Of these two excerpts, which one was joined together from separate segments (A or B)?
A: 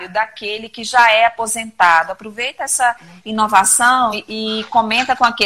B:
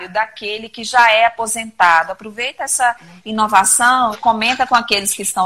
B